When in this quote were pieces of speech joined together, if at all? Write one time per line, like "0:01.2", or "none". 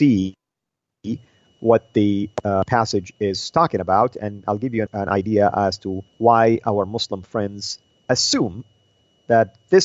0:04.9
0:06.1